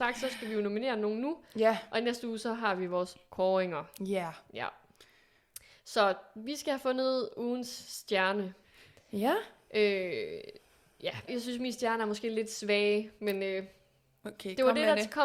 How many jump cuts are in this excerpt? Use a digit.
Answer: 1